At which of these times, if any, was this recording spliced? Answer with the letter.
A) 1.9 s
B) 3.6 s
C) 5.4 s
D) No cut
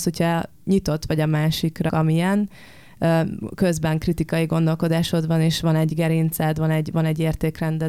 A